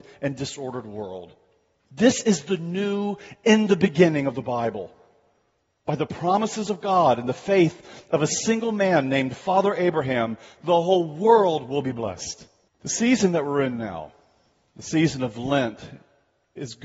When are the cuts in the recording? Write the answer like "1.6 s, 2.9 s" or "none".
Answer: 12.7 s